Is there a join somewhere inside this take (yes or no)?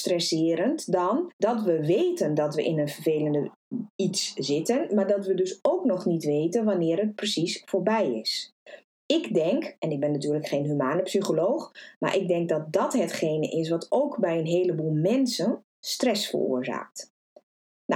yes